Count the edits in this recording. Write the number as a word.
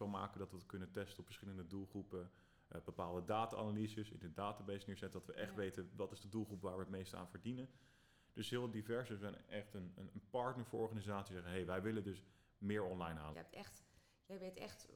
one